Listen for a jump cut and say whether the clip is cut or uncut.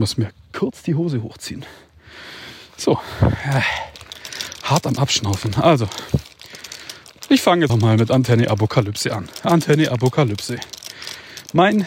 cut